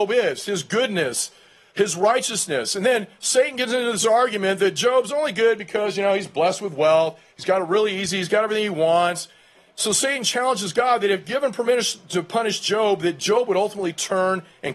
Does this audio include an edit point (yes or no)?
yes